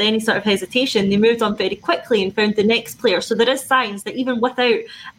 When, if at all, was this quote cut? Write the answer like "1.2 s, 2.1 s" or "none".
none

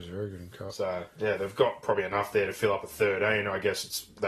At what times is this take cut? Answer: none

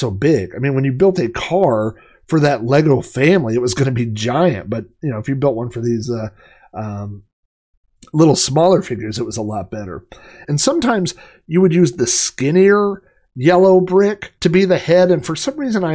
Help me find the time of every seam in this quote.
10.4 s, 14.4 s

